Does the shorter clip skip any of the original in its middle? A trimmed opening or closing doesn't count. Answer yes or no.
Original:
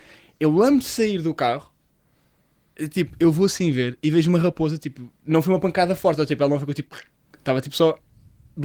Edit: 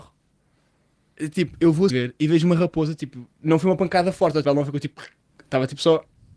yes